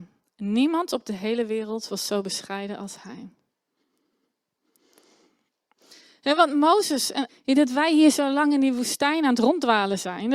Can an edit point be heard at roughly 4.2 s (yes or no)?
no